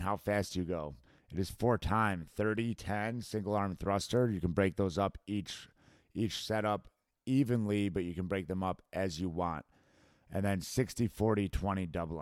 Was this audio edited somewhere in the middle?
yes; 1 cut; at 2.8 s

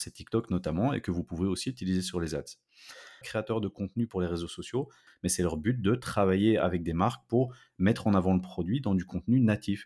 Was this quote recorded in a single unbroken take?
no; 2 cuts; at 3.2 s, 5.1 s

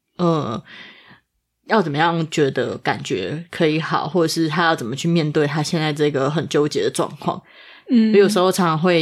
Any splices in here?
no; 0 cuts

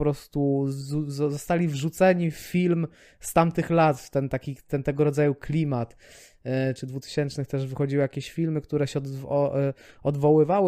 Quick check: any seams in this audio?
yes; 1 cut; at 6.8 s

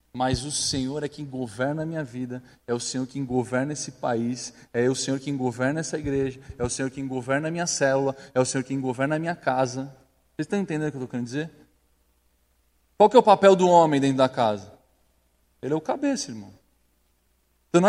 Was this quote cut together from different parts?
no; 0 cuts

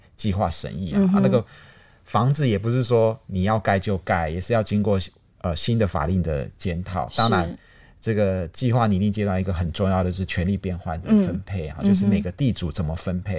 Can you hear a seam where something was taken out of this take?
no; 0 cuts

